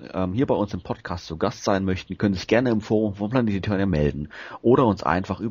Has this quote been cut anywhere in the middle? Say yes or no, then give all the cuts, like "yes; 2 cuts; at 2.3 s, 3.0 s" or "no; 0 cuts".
no; 0 cuts